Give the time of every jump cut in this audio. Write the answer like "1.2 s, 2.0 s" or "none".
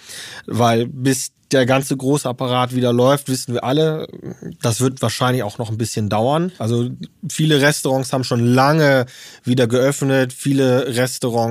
6.6 s

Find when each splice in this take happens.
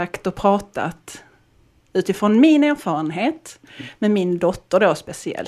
none

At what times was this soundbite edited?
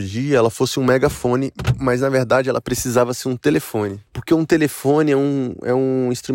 4.1 s

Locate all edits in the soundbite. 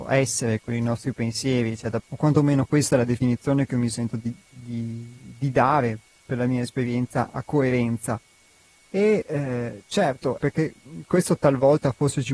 2.0 s, 10.4 s

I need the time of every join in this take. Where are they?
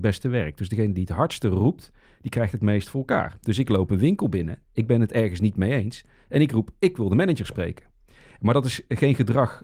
none

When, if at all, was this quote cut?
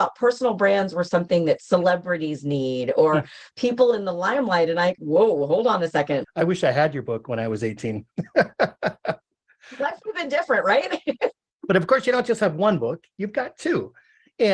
5.0 s, 6.2 s

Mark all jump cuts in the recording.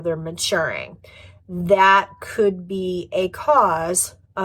none

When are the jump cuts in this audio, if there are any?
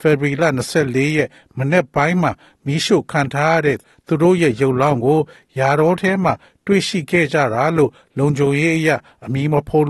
none

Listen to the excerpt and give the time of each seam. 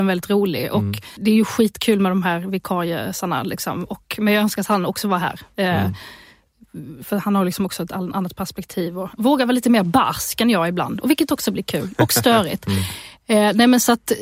1.2 s

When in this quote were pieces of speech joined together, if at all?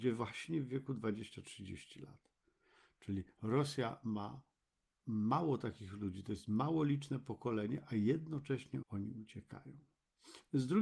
8.8 s

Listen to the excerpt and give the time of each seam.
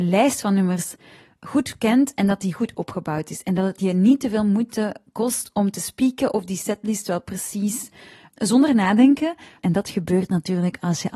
8.3 s, 9.6 s

